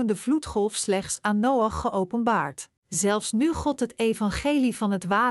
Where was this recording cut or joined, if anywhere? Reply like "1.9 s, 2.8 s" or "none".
2.8 s

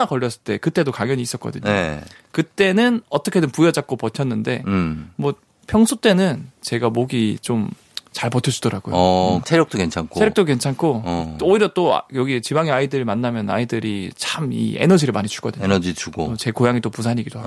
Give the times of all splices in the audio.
9.4 s

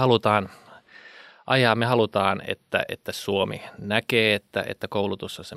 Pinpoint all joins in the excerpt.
none

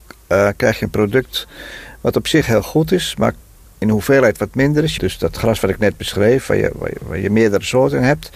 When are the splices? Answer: 5.0 s

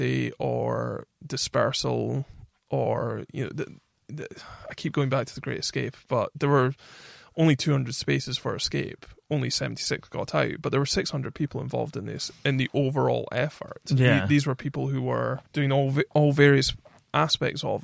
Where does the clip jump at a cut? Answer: 15.5 s

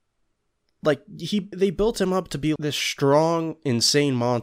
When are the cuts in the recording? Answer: 1.5 s, 2.6 s

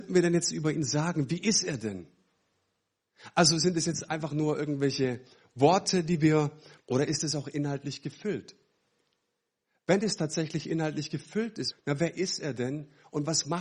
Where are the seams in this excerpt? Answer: 6.8 s, 11.7 s

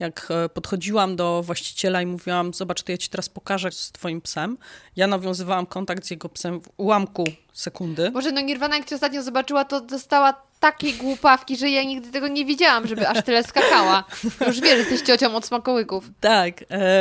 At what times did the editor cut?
3.7 s

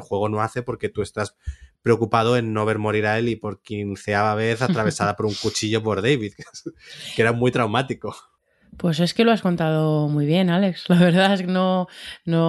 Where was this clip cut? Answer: none

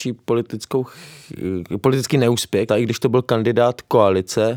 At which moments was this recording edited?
2.7 s

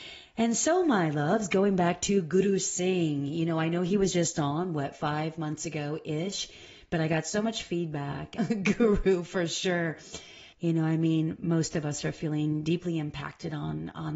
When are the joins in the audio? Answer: 8.4 s, 10.5 s

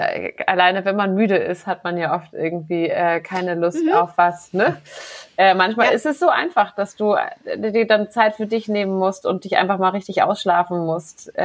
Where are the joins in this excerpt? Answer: none

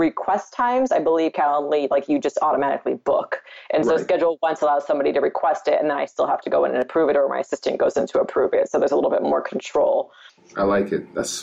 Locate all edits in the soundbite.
none

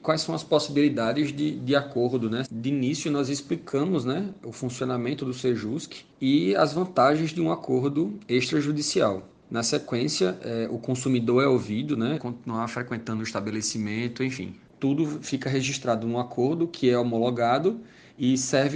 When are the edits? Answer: 2.4 s, 12.2 s, 14.7 s

